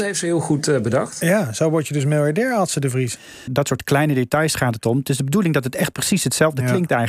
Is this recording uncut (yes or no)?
no